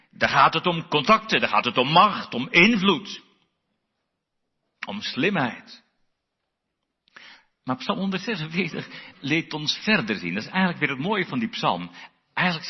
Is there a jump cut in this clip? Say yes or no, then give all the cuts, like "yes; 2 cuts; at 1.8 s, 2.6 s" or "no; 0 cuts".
no; 0 cuts